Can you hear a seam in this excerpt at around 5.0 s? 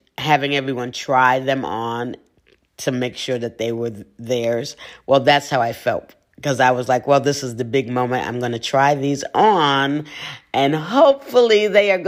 no; 0 cuts

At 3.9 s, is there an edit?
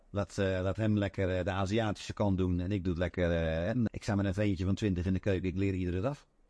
yes; 1 cut; at 3.9 s

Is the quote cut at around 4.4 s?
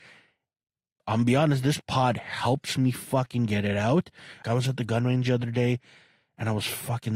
yes; 2 cuts; at 1.0 s, 4.4 s

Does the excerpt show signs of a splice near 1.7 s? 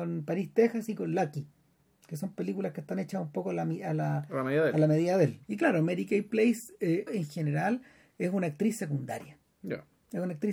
no; 2 cuts; at 5.4 s, 7.1 s

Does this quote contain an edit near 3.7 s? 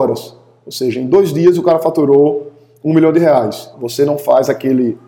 yes; 1 cut; at 3.7 s

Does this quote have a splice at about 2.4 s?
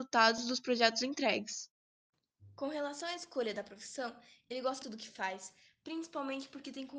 no; 1 cut; at 4.8 s

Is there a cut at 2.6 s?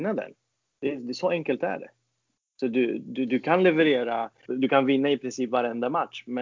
no; 1 cut; at 4.5 s

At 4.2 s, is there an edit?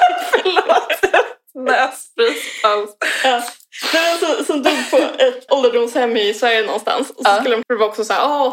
no; 2 cuts; at 5.5 s, 7.6 s

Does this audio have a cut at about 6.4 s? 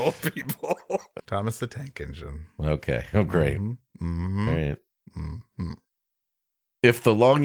no; 1 cut; at 1.2 s

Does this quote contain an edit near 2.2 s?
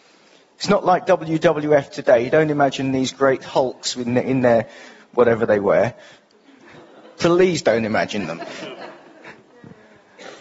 no; 0 cuts

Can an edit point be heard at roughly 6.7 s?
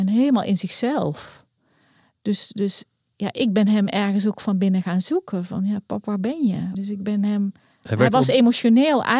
yes; 1 cut; at 6.7 s

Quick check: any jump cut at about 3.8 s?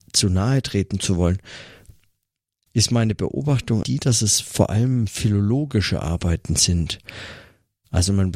yes; 1 cut; at 3.8 s

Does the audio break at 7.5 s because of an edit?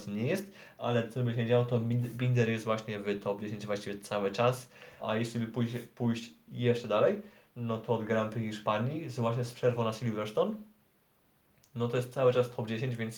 no; 1 cut; at 5.0 s

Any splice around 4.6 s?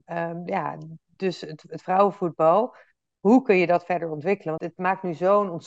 yes; 1 cut; at 4.6 s

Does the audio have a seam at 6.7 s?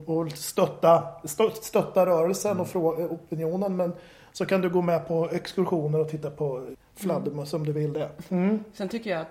yes; 2 cuts; at 6.7 s, 8.3 s

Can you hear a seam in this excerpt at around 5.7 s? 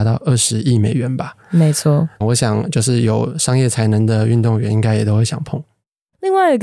no; 1 cut; at 2.2 s

